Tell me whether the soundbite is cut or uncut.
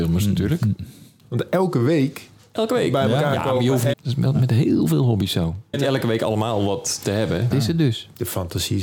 cut